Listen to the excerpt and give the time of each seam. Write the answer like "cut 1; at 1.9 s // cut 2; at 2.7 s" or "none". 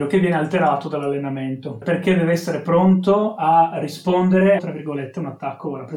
cut 1; at 1.8 s // cut 2; at 4.6 s